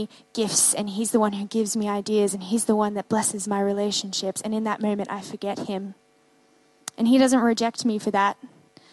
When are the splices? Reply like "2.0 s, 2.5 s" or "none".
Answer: none

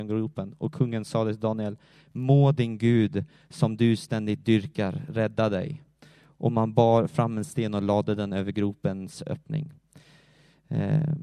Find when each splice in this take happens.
none

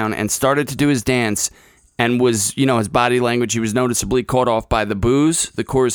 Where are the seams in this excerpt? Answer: none

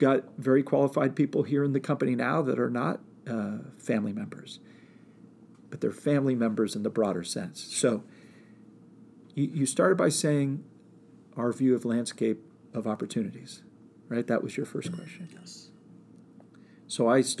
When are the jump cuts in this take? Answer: 5.6 s

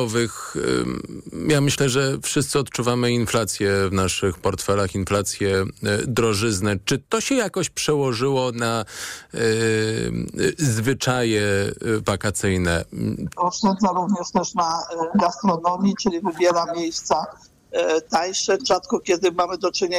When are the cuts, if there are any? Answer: 13.4 s, 18.6 s

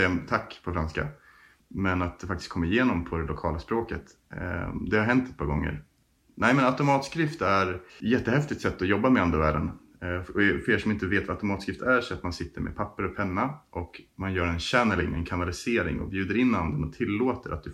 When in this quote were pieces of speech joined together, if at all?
7.9 s

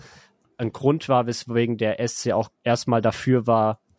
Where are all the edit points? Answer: 2.5 s

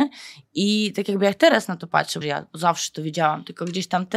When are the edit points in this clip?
2.2 s

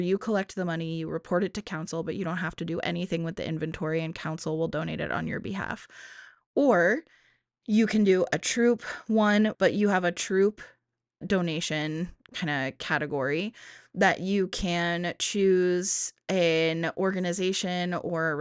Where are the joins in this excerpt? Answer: 9.5 s, 11.2 s

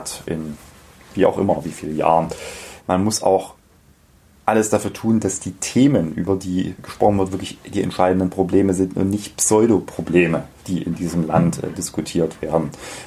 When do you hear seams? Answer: 2.8 s

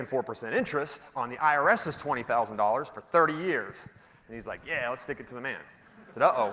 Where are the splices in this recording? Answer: 4.2 s

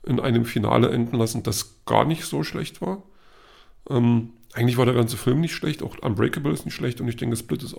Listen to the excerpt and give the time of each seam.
none

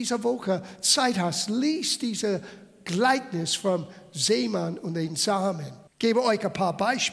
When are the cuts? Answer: 5.9 s

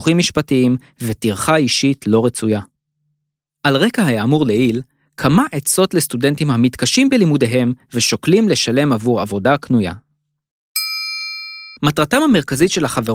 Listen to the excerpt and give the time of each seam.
11.8 s

